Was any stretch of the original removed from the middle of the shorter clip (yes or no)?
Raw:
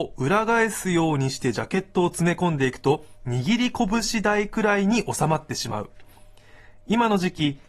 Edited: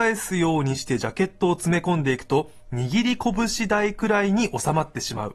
no